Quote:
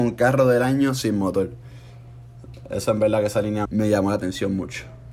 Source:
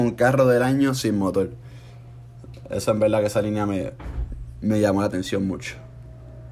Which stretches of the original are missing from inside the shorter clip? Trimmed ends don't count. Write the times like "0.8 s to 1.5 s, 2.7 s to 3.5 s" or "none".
3.7 s to 4.6 s